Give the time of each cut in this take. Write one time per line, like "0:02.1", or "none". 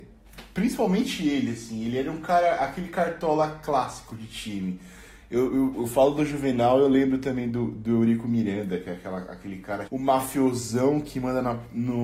0:05.7
0:09.9